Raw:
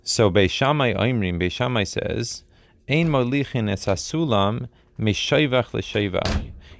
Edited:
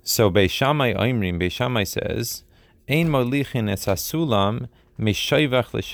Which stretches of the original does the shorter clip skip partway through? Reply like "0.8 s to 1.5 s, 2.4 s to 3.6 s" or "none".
none